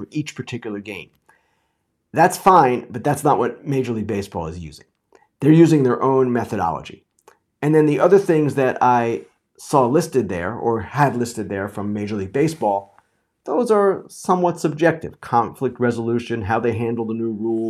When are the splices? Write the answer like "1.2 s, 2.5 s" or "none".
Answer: none